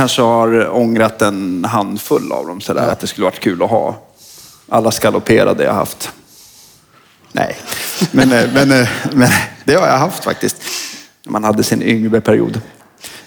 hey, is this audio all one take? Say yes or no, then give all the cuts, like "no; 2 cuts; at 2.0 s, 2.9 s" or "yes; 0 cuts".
yes; 0 cuts